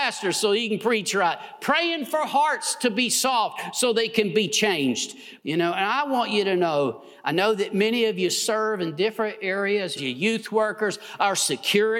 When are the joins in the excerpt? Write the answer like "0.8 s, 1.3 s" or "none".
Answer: 5.4 s, 10.0 s